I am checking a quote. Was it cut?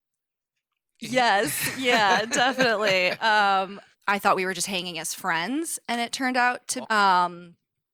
yes; 2 cuts; at 3.9 s, 6.8 s

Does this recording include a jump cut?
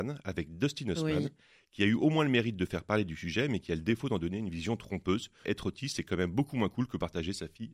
yes; 1 cut; at 5.4 s

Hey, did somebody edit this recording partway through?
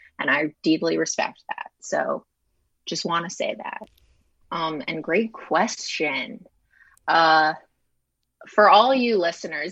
yes; 1 cut; at 4.4 s

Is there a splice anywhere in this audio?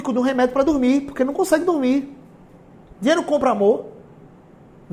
yes; 1 cut; at 2.9 s

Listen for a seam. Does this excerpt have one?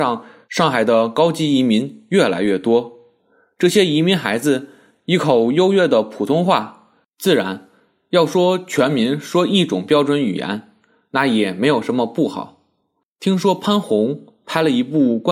yes; 2 cuts; at 7.0 s, 13.0 s

